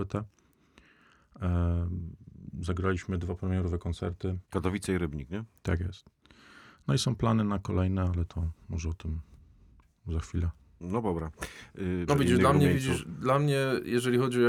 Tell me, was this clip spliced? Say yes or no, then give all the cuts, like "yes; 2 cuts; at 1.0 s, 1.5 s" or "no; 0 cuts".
yes; 2 cuts; at 4.4 s, 12.1 s